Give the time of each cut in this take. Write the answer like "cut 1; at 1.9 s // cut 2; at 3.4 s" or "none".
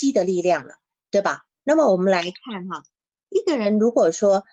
cut 1; at 1.6 s